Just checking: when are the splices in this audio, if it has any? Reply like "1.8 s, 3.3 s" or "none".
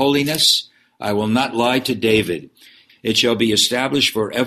2.9 s